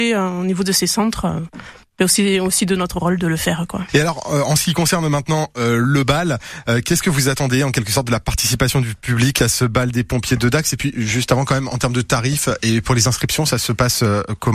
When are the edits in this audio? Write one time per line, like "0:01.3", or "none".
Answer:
none